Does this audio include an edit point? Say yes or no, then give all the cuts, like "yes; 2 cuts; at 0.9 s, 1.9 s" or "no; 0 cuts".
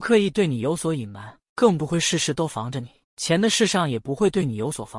yes; 1 cut; at 3.0 s